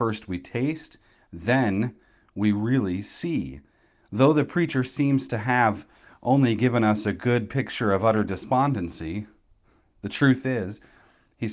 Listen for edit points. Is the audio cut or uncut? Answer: uncut